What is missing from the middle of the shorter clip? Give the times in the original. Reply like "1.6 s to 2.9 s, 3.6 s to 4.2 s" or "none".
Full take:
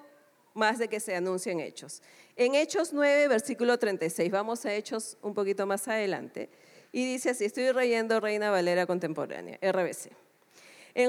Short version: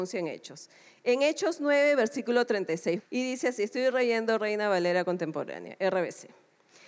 4.3 s to 6.8 s